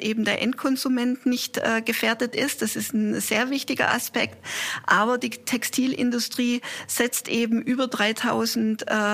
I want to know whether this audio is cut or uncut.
uncut